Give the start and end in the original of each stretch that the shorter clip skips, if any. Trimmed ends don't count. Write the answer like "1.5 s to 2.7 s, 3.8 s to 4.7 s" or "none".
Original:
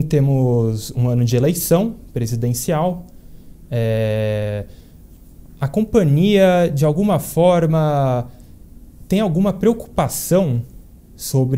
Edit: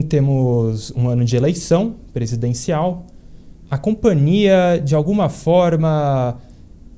3.7 s to 5.6 s